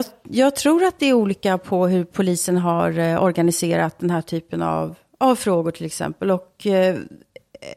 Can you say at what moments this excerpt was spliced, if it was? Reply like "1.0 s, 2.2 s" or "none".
none